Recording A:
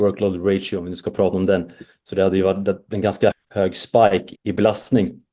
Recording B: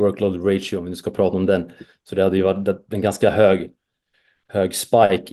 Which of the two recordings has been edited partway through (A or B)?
A